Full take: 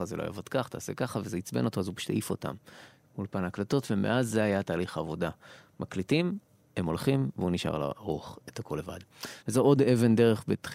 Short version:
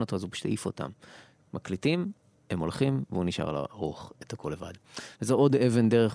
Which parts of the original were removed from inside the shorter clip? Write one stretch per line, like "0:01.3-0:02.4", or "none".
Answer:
0:03.1-0:05.7